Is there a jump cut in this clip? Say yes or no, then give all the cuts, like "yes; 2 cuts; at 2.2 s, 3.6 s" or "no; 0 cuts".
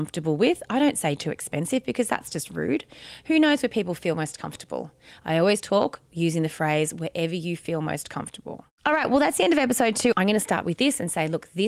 yes; 2 cuts; at 8.8 s, 10.1 s